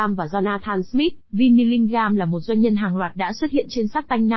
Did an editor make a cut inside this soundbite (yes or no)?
yes